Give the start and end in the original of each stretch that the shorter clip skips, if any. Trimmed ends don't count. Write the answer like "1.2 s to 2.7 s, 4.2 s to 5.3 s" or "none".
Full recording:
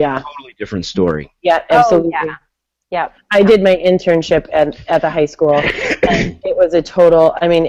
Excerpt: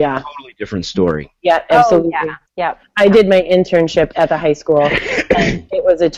2.5 s to 2.8 s, 4.5 s to 4.8 s

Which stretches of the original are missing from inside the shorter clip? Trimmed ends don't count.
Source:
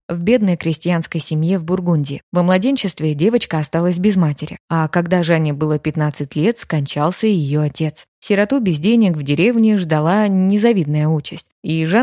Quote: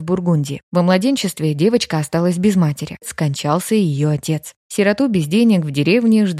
4.6 s to 6.5 s

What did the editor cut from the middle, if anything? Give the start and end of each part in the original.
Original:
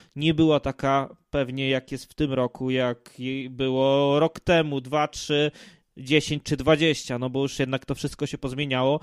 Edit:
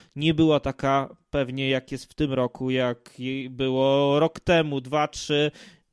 none

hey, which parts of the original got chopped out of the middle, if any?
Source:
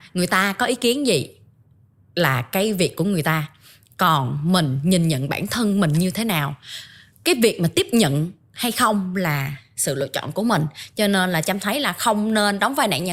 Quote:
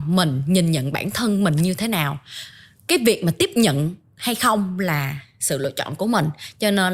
none

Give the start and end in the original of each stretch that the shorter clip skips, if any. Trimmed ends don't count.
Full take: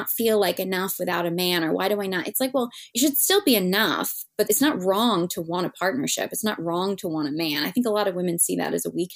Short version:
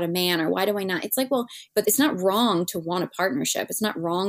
2.9 s to 4.3 s

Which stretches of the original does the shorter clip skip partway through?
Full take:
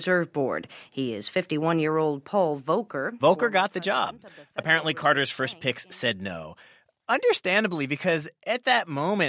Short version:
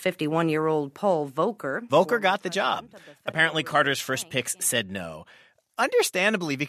none

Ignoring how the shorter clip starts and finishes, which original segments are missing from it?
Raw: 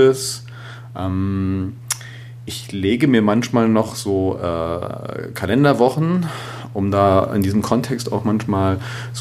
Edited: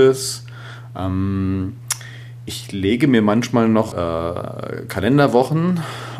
3.9 s to 4.4 s

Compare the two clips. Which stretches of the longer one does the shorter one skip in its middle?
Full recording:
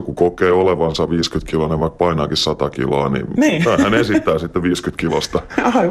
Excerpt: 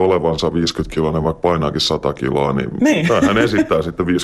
none

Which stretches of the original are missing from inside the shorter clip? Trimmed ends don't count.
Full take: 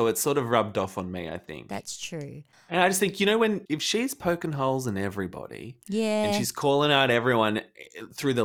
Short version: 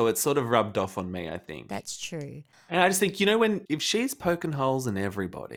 none

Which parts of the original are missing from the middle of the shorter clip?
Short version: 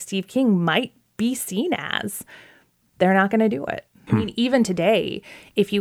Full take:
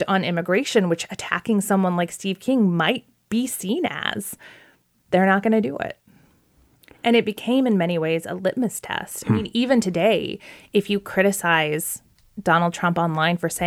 6.2 s to 9.2 s

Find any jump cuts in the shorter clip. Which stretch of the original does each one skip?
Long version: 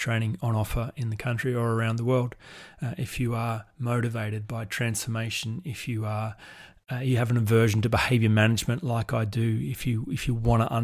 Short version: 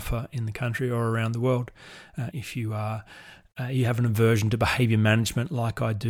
3.0 s to 5.6 s

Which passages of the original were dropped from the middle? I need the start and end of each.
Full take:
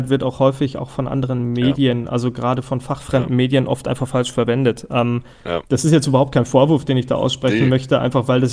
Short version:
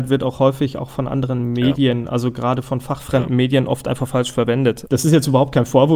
4.9 s to 5.7 s

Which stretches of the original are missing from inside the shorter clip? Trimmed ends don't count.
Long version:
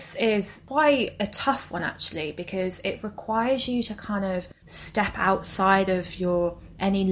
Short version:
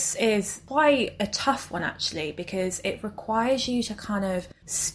none

